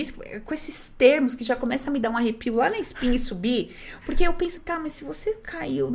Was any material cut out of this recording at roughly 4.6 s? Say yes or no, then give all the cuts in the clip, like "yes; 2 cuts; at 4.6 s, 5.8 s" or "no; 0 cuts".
yes; 1 cut; at 4.6 s